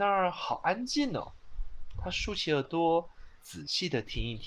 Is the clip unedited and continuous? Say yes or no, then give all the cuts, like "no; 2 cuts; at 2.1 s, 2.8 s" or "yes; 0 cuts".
no; 1 cut; at 1.9 s